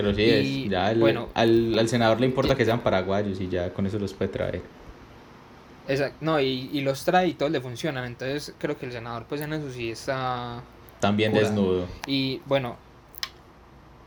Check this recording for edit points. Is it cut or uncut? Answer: uncut